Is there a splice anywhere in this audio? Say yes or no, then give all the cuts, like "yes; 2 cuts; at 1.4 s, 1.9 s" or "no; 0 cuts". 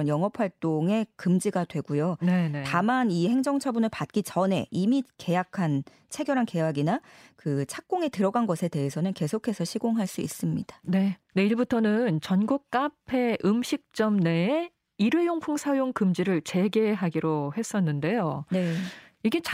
yes; 1 cut; at 11.2 s